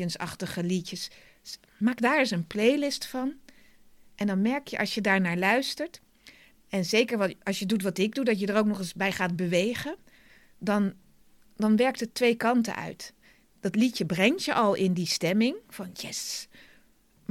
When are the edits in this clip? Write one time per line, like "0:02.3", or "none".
none